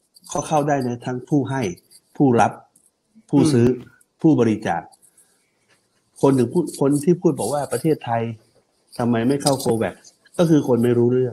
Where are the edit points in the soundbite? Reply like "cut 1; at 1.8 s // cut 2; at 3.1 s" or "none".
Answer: none